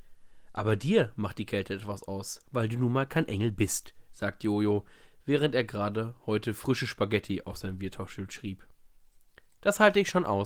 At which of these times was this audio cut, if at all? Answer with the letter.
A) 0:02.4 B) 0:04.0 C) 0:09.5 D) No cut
D